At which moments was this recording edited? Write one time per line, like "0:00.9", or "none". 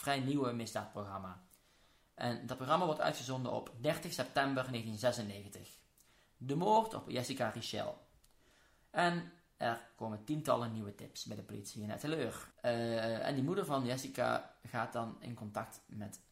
0:12.5